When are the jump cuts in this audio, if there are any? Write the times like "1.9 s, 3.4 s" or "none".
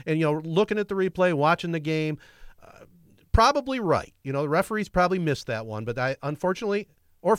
none